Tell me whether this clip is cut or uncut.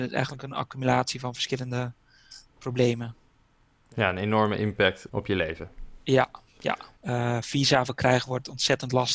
cut